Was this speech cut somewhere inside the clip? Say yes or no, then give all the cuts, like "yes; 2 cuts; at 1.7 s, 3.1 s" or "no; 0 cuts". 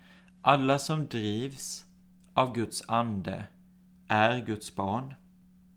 no; 0 cuts